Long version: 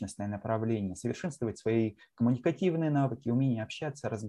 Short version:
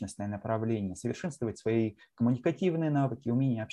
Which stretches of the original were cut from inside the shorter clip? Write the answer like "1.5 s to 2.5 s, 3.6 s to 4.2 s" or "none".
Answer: none